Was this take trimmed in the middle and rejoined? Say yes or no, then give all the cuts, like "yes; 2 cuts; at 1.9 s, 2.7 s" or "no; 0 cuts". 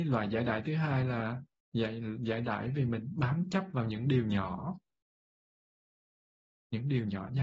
no; 0 cuts